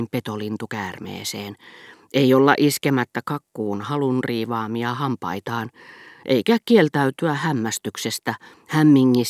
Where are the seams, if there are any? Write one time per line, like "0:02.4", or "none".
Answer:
none